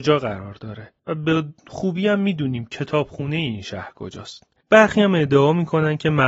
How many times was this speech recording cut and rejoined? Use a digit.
2